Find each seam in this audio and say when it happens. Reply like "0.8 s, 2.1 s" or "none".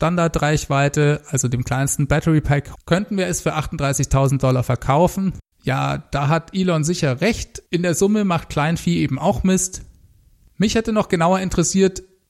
2.7 s, 5.5 s, 7.7 s